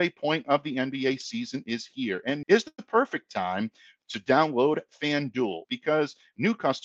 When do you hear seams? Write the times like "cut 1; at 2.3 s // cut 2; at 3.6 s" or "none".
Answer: cut 1; at 2.4 s // cut 2; at 5.6 s